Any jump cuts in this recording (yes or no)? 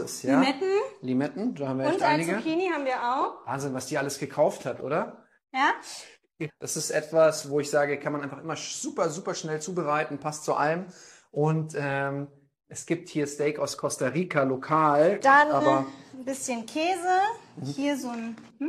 yes